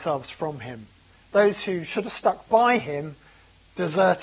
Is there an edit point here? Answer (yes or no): no